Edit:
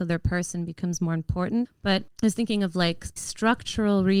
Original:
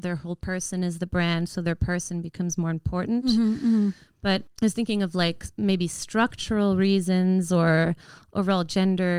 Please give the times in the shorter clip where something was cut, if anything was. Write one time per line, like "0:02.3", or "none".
0:01.6
0:03.2